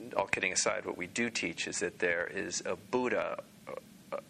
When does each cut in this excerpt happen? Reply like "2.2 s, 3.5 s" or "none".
none